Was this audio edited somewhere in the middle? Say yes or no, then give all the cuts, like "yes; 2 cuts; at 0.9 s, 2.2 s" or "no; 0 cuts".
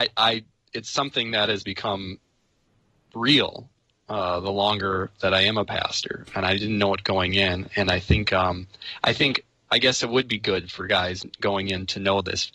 no; 0 cuts